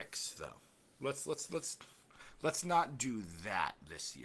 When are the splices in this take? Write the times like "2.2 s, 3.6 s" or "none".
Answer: none